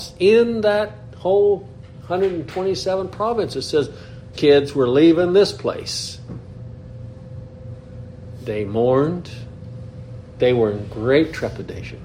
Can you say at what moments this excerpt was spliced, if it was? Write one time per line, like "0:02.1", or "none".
0:04.3